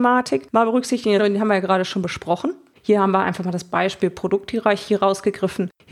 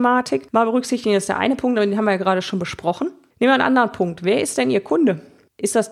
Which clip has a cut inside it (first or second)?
first